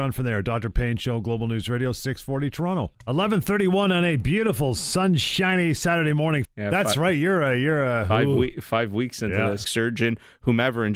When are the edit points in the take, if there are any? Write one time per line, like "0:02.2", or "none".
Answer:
0:06.4
0:09.6